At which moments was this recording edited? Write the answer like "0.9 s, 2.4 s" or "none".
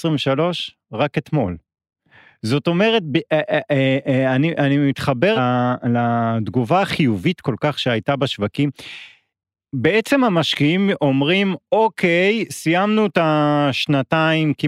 5.4 s